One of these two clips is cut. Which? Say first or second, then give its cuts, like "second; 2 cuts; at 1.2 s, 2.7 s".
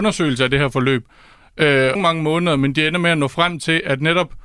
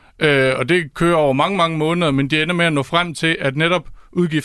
first; 1 cut; at 2.0 s